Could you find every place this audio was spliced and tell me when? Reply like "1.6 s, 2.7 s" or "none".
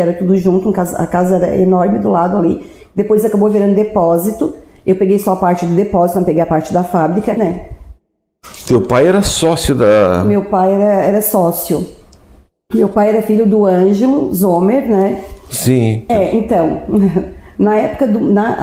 7.4 s, 16.1 s